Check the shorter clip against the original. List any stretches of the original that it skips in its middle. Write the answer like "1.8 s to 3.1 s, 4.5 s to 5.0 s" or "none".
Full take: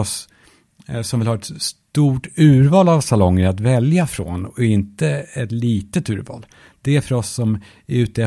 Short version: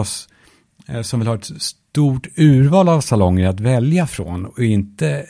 none